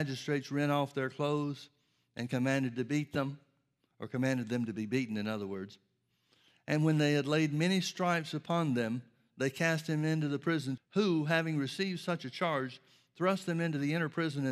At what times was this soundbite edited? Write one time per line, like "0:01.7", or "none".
0:10.8